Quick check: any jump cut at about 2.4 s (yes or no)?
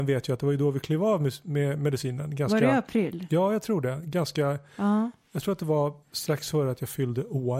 no